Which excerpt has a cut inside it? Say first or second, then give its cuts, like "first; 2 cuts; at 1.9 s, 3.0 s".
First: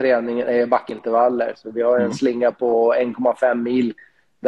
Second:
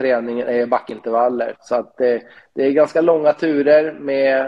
second; 1 cut; at 1.5 s